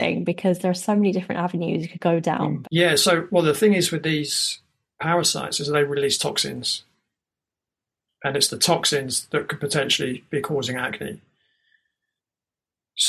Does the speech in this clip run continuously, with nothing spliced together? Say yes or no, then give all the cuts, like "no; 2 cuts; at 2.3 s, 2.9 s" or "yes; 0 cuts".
no; 1 cut; at 2.6 s